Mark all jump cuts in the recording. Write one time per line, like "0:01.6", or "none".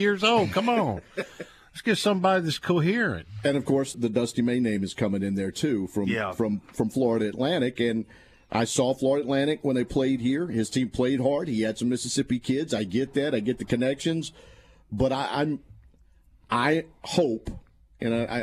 0:03.9